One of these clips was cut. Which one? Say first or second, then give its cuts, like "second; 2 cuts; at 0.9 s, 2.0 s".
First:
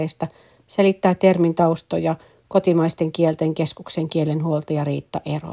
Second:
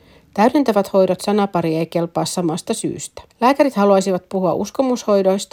second; 1 cut; at 3.3 s